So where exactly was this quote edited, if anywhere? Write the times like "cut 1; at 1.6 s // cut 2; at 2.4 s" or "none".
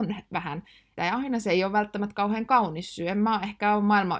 cut 1; at 1.0 s